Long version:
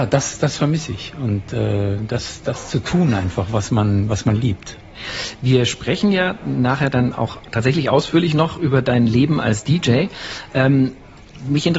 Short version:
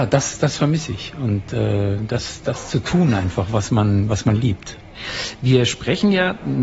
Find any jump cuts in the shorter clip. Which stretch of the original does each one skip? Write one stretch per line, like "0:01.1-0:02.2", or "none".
none